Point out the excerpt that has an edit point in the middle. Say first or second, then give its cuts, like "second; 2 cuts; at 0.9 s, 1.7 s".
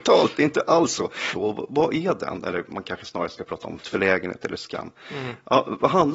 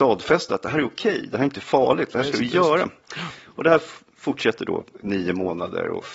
first; 2 cuts; at 1.3 s, 3.8 s